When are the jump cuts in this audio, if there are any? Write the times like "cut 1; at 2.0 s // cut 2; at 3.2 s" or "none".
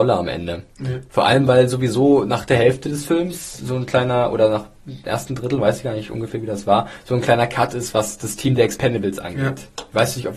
none